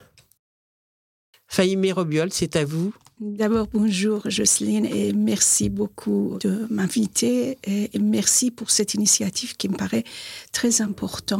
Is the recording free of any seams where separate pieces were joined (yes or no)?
no